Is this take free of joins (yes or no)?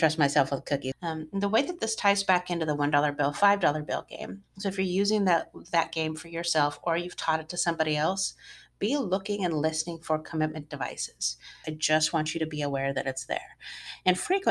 no